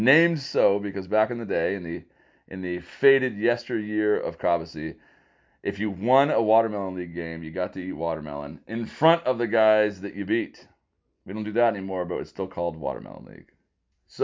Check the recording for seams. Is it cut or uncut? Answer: uncut